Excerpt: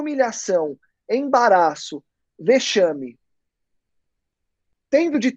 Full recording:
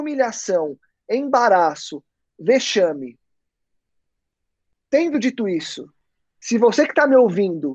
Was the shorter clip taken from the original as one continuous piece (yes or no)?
yes